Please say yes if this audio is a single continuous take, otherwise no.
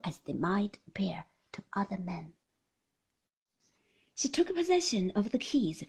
yes